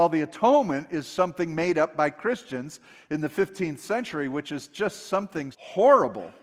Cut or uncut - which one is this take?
cut